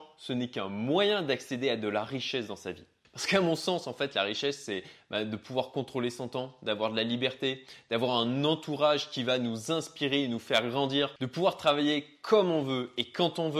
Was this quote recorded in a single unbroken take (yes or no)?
yes